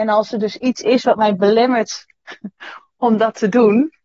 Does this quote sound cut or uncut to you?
uncut